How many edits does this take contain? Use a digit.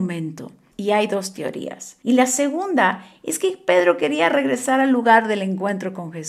1